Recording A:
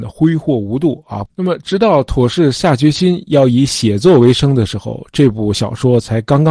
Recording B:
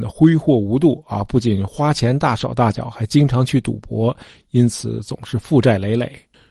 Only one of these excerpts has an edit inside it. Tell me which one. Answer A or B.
A